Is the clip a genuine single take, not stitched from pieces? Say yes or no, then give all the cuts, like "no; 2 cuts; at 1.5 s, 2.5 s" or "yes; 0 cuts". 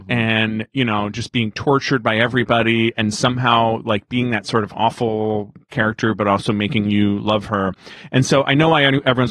yes; 0 cuts